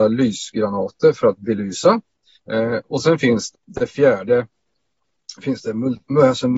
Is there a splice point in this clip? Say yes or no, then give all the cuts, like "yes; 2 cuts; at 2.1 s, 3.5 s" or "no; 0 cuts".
yes; 2 cuts; at 2.3 s, 3.5 s